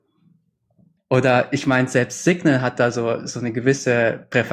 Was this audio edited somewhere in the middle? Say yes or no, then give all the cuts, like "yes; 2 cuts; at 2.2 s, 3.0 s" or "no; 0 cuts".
yes; 1 cut; at 1.0 s